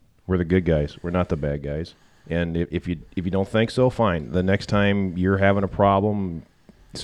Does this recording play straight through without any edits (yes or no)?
yes